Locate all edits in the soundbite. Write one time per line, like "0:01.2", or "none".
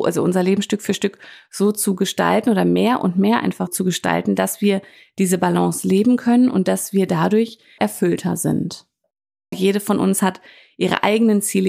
0:03.7
0:07.8
0:09.5